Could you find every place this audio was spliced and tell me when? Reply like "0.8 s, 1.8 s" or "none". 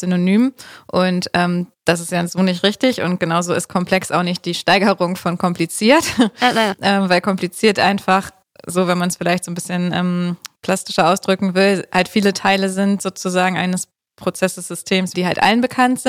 15.1 s

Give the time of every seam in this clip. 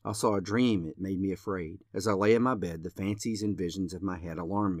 1.9 s

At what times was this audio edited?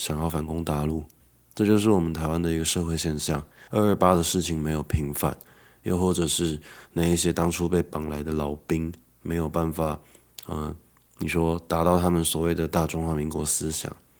3.7 s

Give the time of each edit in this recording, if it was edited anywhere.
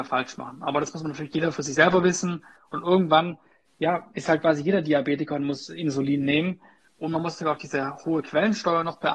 2.6 s, 6.9 s

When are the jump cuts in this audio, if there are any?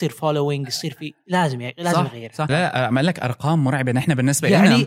2.5 s

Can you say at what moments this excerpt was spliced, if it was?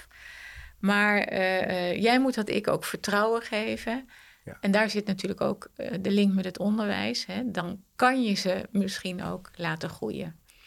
none

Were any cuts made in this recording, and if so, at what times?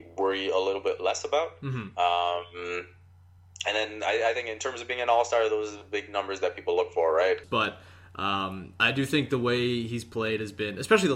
7.4 s

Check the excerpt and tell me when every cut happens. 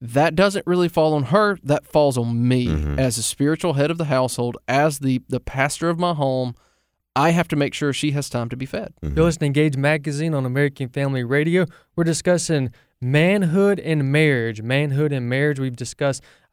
none

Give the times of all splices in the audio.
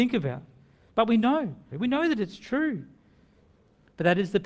1.7 s

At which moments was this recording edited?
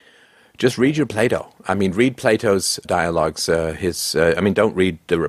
2.8 s

